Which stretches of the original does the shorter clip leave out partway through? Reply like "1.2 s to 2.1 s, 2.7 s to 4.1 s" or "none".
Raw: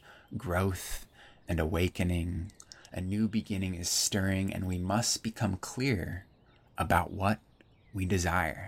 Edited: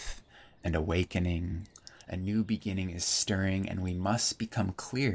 none